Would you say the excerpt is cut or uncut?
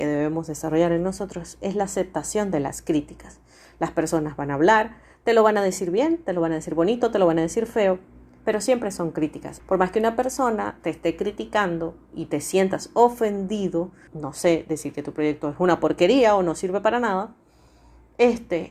cut